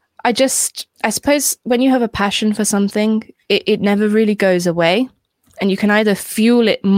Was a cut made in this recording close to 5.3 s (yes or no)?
no